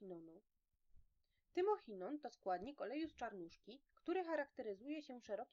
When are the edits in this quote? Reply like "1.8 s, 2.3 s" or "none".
none